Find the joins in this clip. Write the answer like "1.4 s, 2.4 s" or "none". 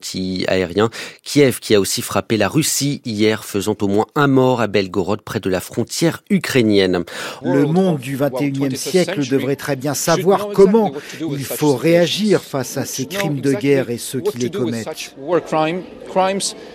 7.4 s